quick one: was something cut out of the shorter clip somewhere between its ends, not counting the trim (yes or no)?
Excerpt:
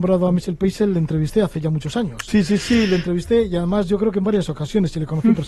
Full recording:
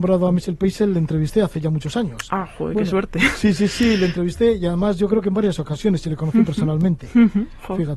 yes